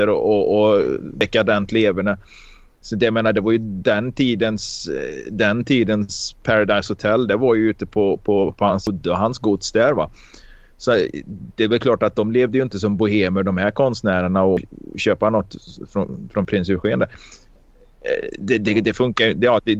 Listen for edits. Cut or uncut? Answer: uncut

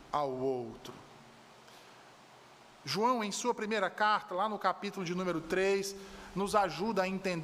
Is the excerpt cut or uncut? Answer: uncut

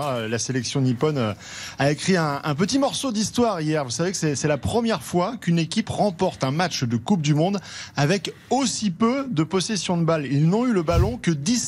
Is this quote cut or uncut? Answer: uncut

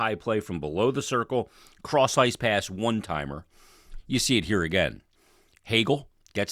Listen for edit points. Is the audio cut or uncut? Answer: cut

